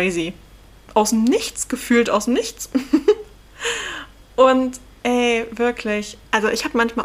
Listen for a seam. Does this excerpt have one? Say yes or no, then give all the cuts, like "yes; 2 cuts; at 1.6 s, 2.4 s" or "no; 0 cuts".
no; 0 cuts